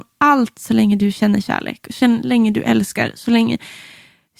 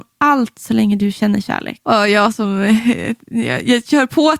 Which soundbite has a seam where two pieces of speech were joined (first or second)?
second